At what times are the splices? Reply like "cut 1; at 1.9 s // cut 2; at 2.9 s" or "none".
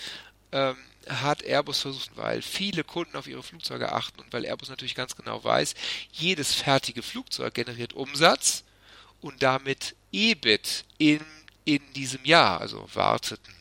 cut 1; at 2.1 s // cut 2; at 12.6 s

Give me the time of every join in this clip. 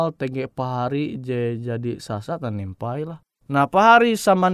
cut 1; at 3.4 s

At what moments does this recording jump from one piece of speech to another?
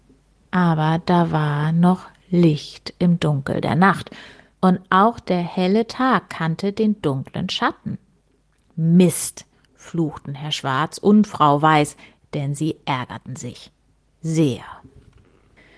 none

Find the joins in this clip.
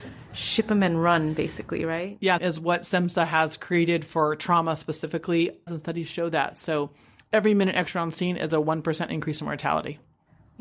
cut 1; at 2.4 s // cut 2; at 5.7 s

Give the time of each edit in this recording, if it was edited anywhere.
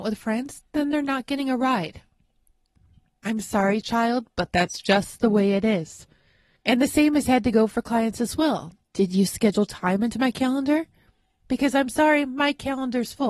none

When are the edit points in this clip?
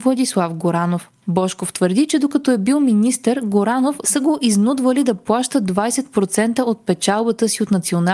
cut 1; at 4.0 s

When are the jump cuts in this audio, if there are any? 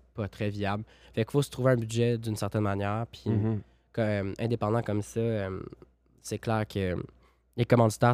none

